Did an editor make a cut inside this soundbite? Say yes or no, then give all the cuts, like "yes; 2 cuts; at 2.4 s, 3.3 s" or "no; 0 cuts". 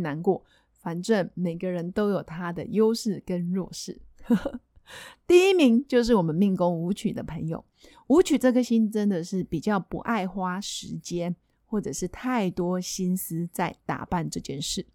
no; 0 cuts